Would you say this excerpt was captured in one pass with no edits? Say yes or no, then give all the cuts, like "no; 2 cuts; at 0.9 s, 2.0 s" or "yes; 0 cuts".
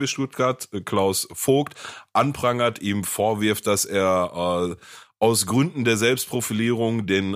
yes; 0 cuts